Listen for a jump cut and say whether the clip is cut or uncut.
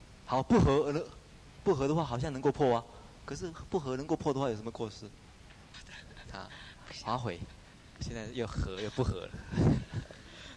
uncut